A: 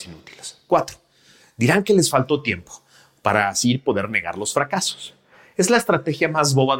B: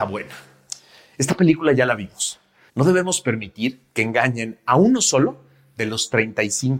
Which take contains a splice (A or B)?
B